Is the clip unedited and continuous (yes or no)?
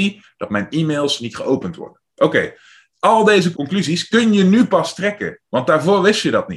no